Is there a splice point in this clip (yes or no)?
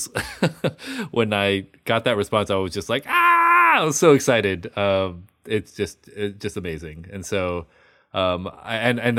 no